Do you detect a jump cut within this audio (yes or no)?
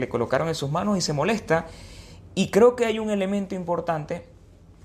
no